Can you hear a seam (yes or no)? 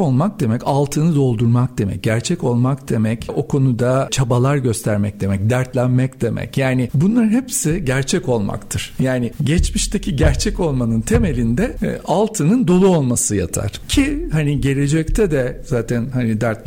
yes